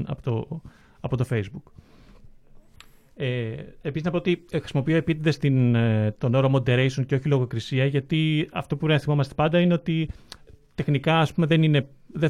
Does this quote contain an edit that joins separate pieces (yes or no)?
no